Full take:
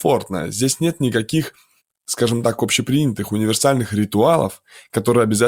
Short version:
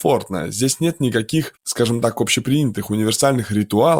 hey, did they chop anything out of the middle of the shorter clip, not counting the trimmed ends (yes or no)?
yes